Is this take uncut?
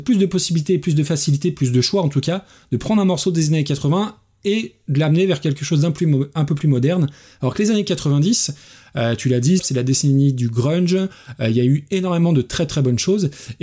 no; 1 cut; at 9.6 s

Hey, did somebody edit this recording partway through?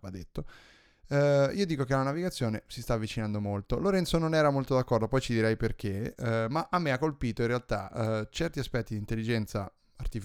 no; 0 cuts

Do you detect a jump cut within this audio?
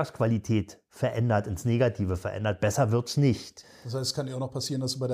yes; 1 cut; at 3.6 s

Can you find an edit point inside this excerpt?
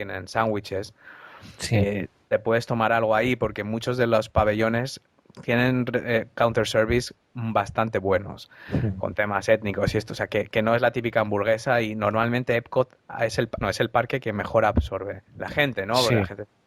yes; 2 cuts; at 13.6 s, 15.3 s

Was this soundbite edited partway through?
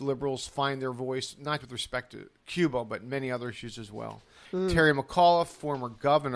yes; 2 cuts; at 1.6 s, 4.4 s

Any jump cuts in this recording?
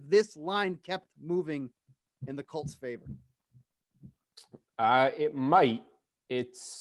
no; 0 cuts

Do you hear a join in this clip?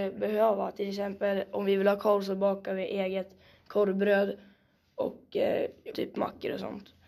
yes; 1 cut; at 5.9 s

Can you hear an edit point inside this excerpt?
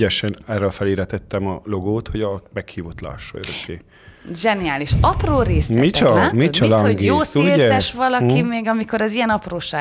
no; 0 cuts

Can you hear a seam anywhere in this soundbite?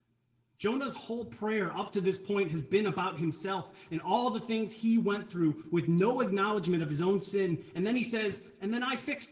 no; 0 cuts

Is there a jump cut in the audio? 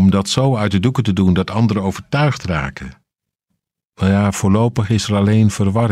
no; 0 cuts

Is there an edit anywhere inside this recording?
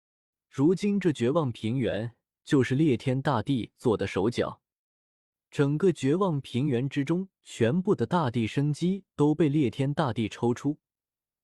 no; 0 cuts

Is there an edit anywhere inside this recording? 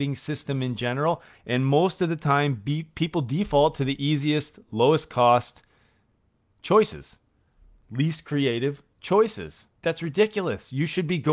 yes; 1 cut; at 1.4 s

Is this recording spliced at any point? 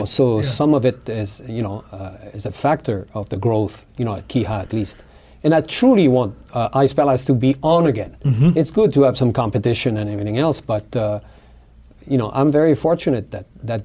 no; 0 cuts

